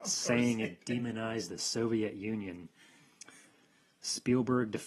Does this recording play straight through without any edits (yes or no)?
yes